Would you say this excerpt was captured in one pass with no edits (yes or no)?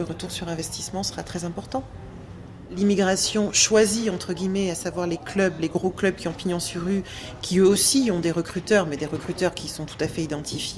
yes